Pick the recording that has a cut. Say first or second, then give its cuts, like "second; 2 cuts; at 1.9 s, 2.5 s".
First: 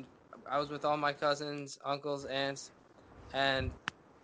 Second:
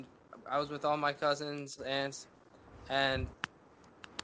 second; 1 cut; at 1.8 s